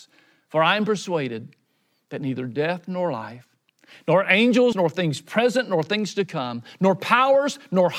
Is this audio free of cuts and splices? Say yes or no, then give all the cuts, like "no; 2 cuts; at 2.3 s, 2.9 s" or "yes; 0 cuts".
no; 1 cut; at 4.7 s